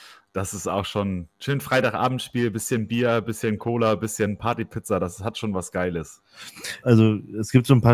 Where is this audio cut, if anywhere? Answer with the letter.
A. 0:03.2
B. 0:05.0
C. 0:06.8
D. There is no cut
C